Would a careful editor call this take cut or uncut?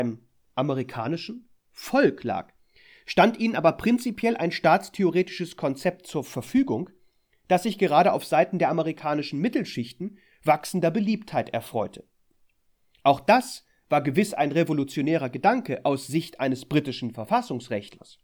uncut